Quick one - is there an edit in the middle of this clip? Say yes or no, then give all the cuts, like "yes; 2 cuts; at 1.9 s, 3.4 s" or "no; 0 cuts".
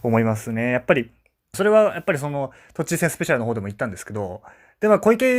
yes; 1 cut; at 1.5 s